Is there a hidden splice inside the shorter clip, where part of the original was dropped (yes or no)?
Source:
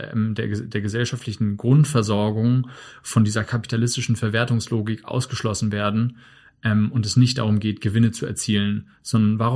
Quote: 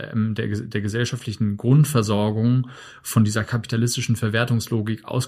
no